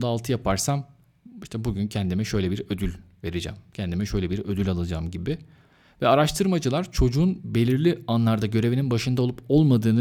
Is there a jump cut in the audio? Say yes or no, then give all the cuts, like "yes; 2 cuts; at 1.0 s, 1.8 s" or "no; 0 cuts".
no; 0 cuts